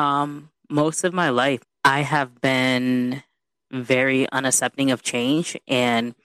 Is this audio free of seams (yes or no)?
no